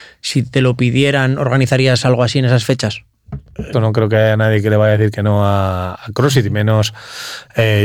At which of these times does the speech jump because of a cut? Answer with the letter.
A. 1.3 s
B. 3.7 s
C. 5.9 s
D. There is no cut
B